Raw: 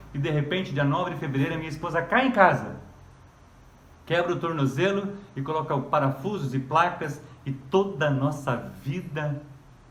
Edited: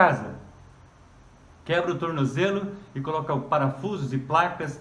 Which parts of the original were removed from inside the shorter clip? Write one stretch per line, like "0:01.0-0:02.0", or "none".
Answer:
none

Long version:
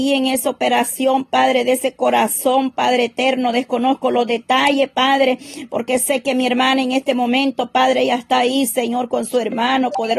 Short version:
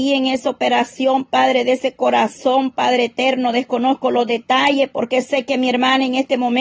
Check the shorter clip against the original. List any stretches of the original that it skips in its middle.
0:04.9-0:05.7

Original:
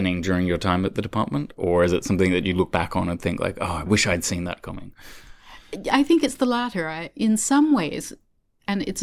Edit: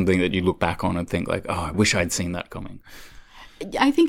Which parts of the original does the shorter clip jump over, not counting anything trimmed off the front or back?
none

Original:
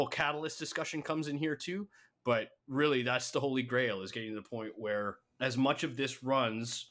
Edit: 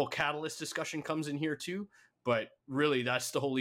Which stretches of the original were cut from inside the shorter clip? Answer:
none

